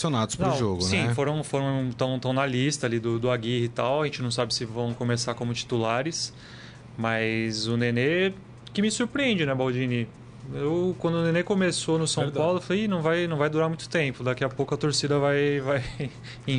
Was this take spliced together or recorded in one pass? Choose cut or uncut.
uncut